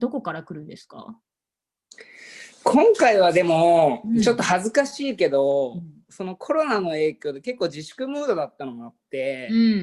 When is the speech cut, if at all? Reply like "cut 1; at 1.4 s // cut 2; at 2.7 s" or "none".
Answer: none